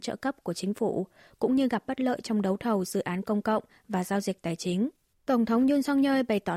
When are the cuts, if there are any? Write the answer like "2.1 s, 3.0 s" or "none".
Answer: 5.1 s